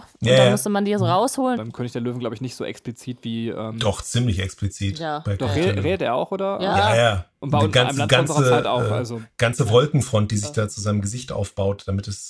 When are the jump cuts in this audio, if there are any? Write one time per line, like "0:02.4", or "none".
0:01.5

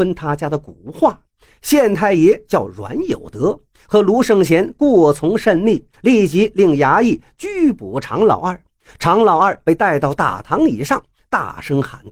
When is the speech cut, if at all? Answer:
0:05.9

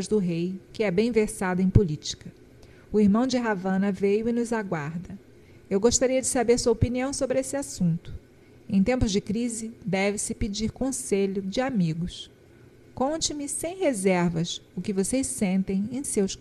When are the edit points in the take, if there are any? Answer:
none

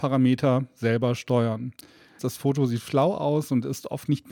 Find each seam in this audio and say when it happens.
0:02.2

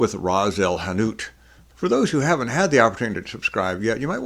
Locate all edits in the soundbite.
0:01.7

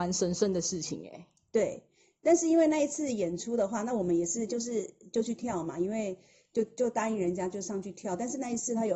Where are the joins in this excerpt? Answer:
none

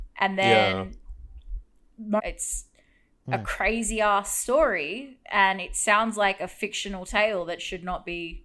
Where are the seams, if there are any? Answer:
0:02.2

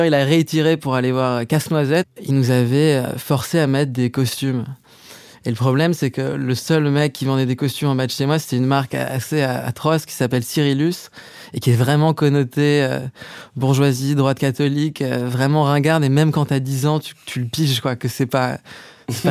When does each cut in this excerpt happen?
0:02.0

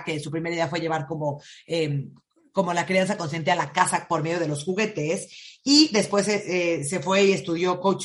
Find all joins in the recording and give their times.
none

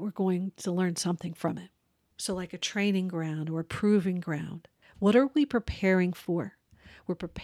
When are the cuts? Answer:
0:02.1
0:04.8

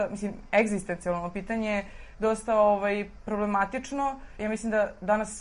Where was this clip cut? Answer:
none

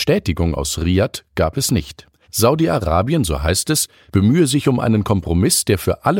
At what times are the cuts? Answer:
0:02.2

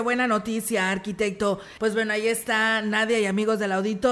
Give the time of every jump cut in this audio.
0:01.8

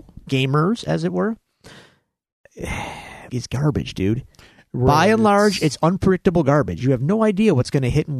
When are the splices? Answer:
0:03.3

